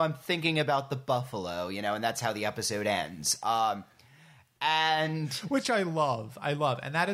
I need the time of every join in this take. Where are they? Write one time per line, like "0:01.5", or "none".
none